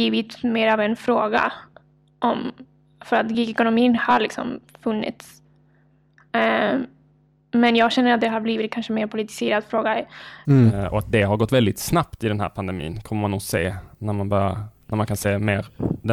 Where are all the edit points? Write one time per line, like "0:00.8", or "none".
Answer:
0:10.4